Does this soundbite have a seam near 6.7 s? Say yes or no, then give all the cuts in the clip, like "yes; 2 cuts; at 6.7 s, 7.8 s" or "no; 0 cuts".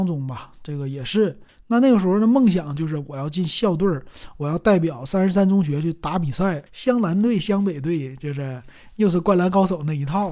yes; 2 cuts; at 1.5 s, 6.7 s